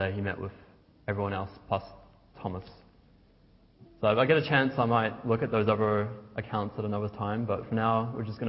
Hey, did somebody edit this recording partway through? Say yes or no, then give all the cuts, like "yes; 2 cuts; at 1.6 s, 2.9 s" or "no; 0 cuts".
yes; 1 cut; at 3.8 s